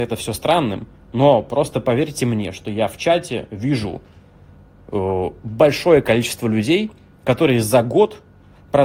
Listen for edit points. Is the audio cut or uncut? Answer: uncut